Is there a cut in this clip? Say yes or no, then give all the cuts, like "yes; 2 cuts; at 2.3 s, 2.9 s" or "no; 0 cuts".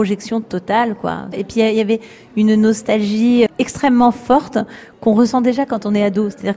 yes; 2 cuts; at 1.3 s, 3.5 s